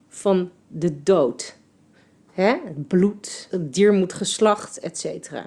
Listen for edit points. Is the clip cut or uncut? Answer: cut